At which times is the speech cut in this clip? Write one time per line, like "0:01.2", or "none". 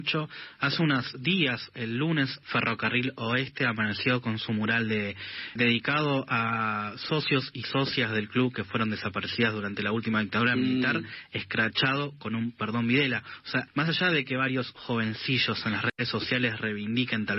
0:02.4
0:05.6
0:13.7